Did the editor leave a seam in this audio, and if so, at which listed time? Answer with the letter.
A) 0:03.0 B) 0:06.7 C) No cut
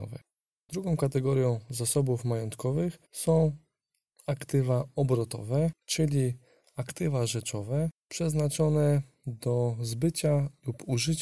A